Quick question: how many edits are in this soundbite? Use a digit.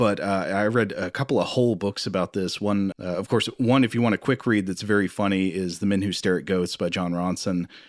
1